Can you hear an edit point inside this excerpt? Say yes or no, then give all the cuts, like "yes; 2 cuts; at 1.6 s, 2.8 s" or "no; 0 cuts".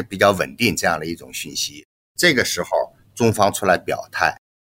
no; 0 cuts